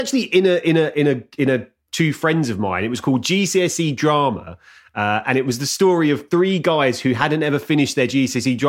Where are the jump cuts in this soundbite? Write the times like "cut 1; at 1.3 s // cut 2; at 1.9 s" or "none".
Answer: cut 1; at 1.9 s